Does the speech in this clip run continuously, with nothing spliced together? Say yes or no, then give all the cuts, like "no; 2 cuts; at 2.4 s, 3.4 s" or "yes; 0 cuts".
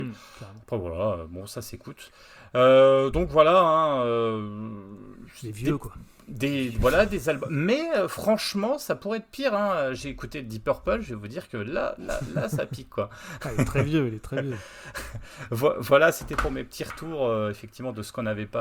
yes; 0 cuts